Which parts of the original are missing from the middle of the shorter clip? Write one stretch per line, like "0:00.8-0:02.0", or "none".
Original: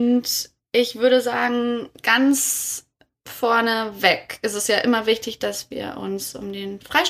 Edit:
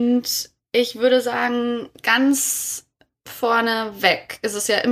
none